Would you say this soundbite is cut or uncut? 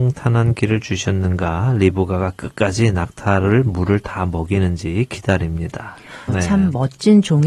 cut